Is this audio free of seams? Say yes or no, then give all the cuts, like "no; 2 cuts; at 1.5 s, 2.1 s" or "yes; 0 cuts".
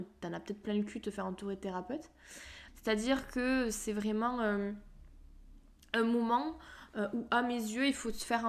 no; 1 cut; at 2.7 s